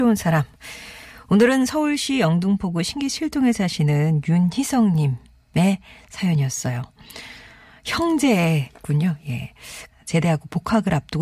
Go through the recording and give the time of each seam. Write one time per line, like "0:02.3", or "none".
0:09.9